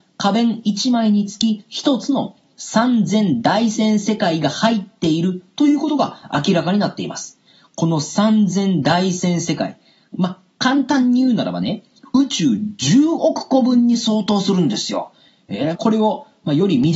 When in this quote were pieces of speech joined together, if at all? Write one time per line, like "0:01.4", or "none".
0:15.7